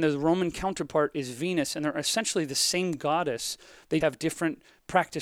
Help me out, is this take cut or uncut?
cut